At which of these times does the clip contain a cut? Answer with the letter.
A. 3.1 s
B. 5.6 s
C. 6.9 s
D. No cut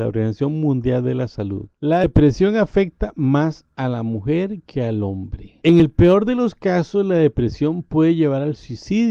B